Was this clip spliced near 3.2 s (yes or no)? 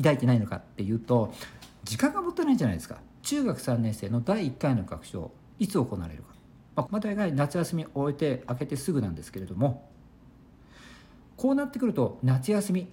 yes